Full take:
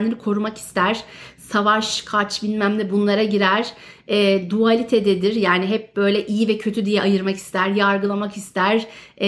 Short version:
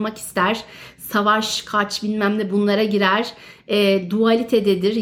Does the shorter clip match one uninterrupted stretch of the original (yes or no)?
yes